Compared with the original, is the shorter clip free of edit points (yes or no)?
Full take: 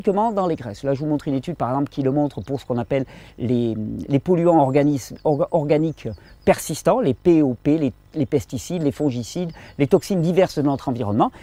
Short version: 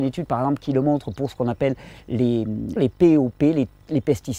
no